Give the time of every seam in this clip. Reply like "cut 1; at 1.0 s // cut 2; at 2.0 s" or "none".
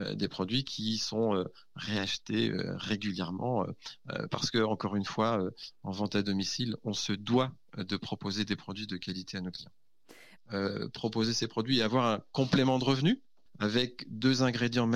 cut 1; at 10.3 s